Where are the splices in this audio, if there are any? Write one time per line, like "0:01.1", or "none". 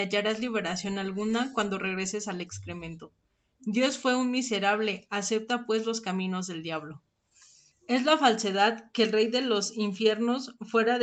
0:07.7